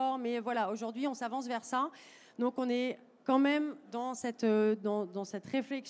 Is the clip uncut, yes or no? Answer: yes